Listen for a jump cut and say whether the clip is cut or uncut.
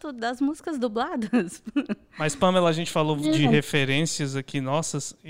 uncut